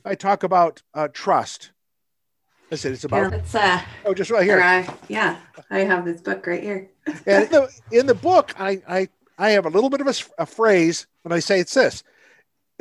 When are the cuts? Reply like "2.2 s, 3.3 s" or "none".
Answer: 3.3 s, 7.5 s, 11.1 s